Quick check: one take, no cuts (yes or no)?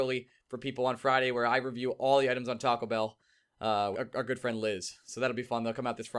no